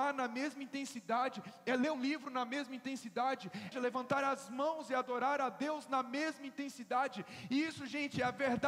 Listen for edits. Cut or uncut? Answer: cut